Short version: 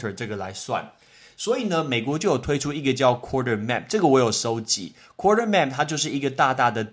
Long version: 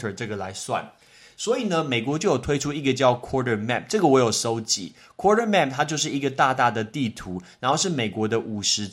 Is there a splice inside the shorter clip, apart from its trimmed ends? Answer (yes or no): no